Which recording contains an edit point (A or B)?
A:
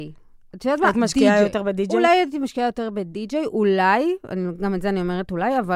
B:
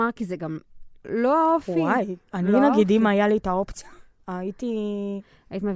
B